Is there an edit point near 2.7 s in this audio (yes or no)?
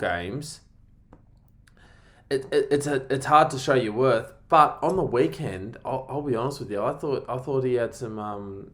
no